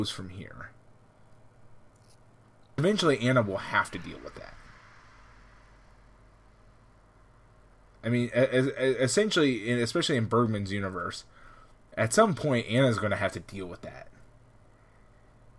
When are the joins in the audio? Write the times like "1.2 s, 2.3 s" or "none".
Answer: 2.8 s

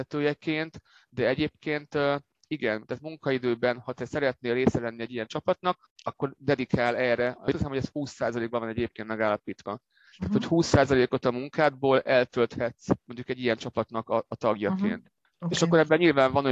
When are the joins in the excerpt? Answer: 5.9 s

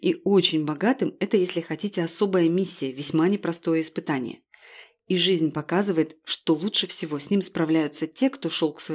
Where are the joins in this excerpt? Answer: none

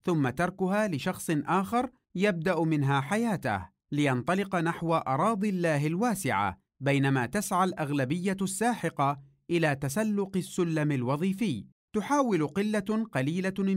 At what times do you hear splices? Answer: none

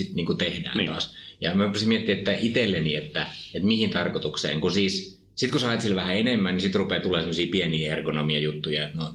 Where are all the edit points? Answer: none

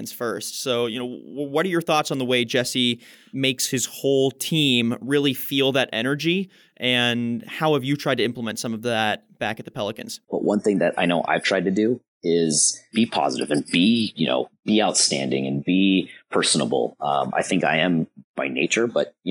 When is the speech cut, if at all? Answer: 10.2 s, 18.2 s

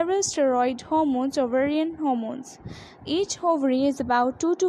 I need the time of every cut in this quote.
3.0 s

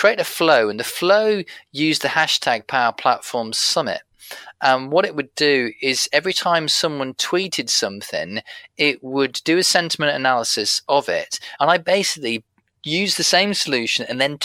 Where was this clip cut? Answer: 11.6 s

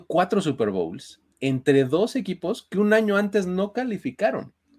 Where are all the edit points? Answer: none

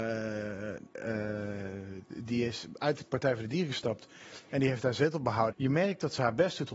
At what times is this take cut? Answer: 2.3 s, 5.5 s

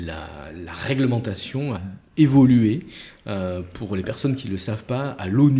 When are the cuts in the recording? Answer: 1.8 s

